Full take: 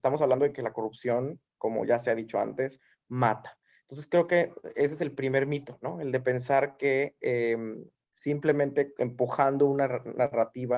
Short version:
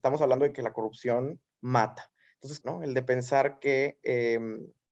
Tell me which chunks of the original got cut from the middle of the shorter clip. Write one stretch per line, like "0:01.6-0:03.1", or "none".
0:01.5-0:03.0
0:04.1-0:05.8